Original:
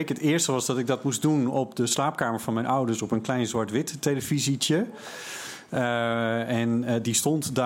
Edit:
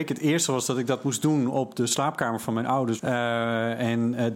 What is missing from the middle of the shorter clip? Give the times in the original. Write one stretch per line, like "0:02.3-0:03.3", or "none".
0:03.0-0:05.7